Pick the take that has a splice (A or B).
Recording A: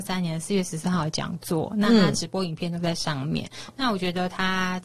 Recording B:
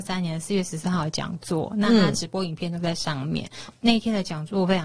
B